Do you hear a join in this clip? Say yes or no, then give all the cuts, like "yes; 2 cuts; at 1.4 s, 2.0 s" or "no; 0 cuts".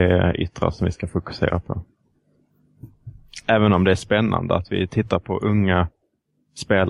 no; 0 cuts